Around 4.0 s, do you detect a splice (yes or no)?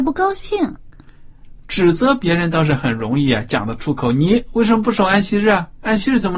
no